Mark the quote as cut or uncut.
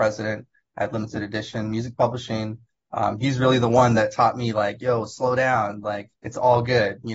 cut